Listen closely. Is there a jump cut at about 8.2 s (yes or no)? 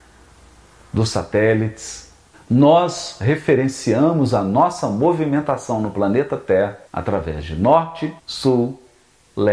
yes